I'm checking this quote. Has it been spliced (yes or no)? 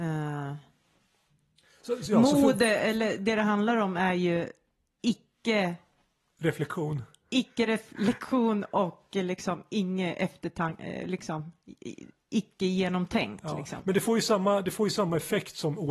no